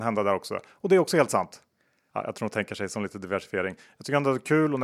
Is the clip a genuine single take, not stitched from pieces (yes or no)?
no